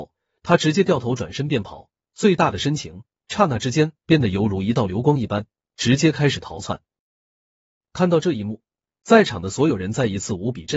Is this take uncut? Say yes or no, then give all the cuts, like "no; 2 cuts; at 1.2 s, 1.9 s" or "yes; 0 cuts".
no; 1 cut; at 7.8 s